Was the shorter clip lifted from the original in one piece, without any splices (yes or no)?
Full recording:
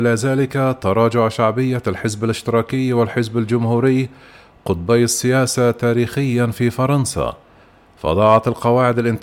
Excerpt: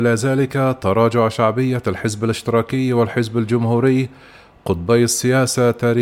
yes